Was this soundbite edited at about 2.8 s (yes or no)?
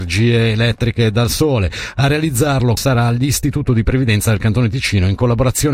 yes